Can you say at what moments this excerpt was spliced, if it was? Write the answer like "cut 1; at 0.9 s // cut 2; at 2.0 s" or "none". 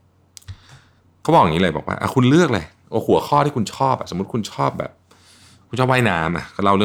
none